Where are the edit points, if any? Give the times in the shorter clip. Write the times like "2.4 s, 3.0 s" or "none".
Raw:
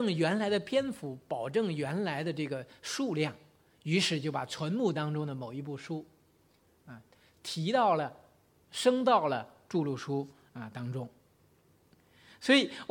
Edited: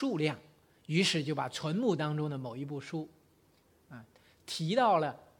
none